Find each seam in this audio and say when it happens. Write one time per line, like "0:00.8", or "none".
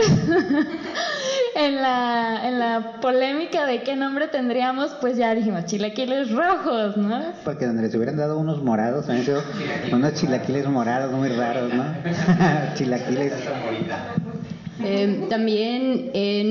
0:07.4